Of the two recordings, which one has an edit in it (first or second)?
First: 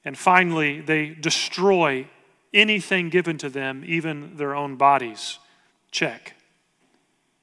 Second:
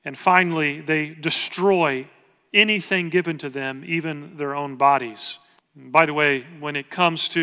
second